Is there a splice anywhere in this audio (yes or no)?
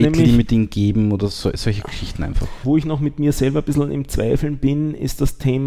yes